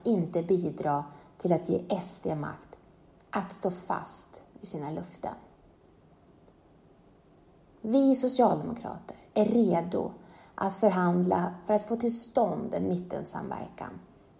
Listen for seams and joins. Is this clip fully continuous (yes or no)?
yes